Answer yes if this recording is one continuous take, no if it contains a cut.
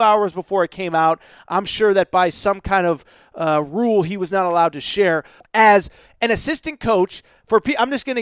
no